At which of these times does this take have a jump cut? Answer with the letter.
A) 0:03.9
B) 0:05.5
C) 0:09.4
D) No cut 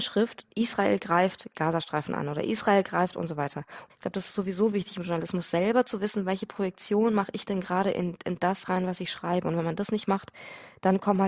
A